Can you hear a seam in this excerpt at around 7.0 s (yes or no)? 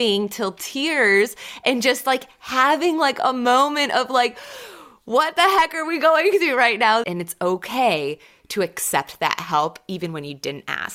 yes